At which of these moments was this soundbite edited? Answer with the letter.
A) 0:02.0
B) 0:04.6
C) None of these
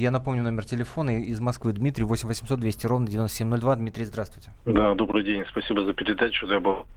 B